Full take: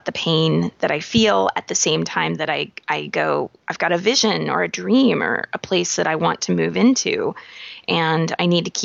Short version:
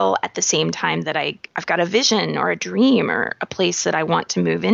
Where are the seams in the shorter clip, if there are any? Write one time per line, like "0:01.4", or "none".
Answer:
0:01.5

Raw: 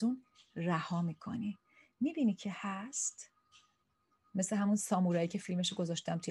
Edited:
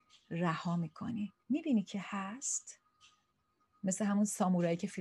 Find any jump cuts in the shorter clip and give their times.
0:01.4

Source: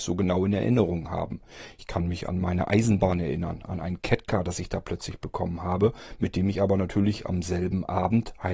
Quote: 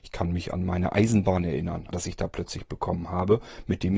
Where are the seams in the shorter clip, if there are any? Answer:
0:01.9

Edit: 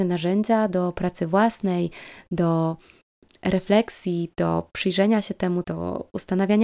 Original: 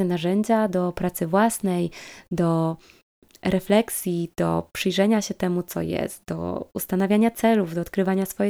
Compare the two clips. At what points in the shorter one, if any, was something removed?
0:05.6

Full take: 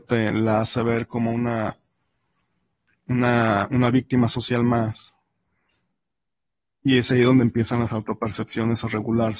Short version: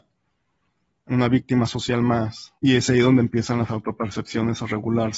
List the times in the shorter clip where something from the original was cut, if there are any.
0:01.1
0:02.6

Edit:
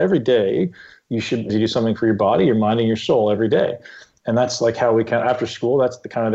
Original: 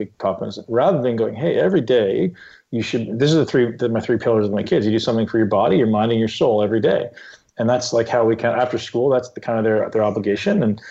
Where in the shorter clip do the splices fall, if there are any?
0:01.5

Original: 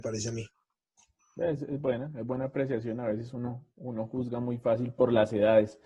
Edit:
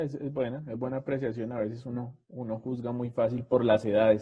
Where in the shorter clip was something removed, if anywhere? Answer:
none

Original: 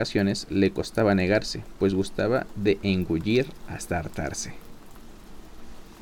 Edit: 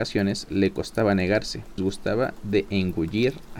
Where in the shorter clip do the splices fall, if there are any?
0:01.8

